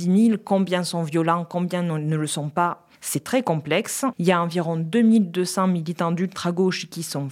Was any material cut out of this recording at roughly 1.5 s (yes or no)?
no